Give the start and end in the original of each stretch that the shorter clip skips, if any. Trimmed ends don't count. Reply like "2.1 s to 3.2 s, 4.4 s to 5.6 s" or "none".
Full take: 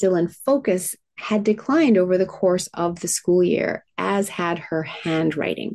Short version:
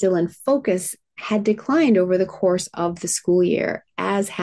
none